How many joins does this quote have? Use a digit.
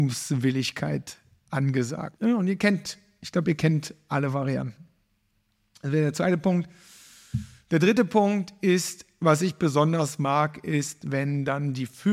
1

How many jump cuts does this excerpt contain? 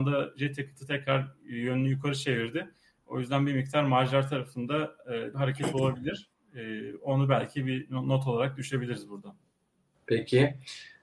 1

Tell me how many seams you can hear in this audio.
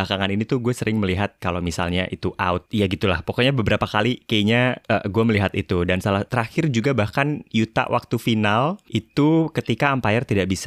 1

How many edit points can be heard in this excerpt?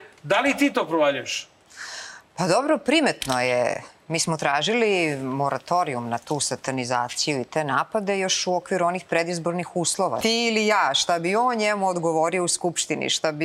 1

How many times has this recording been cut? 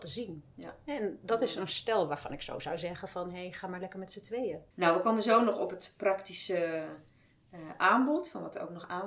1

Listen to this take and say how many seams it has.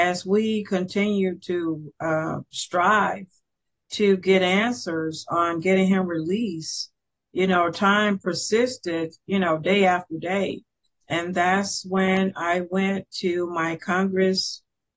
1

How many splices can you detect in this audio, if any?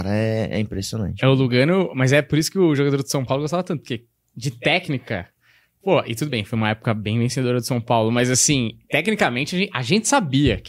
0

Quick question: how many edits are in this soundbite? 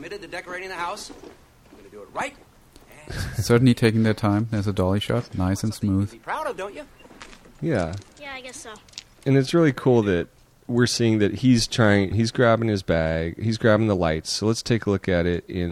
1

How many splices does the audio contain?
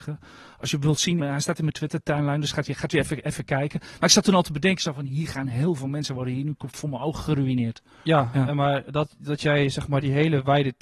1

